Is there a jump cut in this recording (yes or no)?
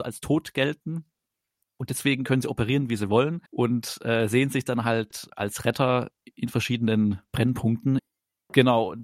yes